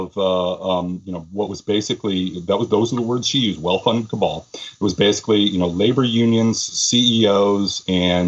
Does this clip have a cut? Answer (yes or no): no